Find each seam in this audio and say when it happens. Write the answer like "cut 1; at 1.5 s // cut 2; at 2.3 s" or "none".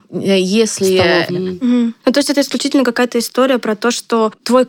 cut 1; at 1.3 s